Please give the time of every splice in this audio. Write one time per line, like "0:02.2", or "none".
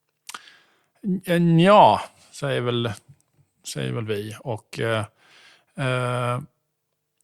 none